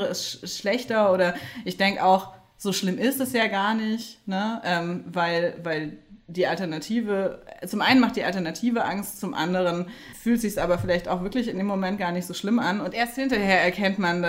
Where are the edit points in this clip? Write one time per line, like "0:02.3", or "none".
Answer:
none